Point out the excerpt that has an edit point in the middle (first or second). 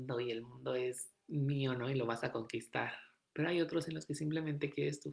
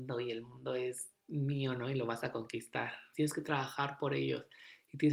second